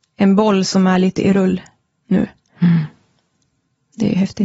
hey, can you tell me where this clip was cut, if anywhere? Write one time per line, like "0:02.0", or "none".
none